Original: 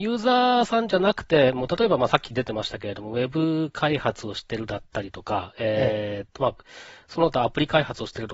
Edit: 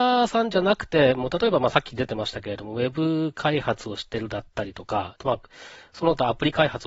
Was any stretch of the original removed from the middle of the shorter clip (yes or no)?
yes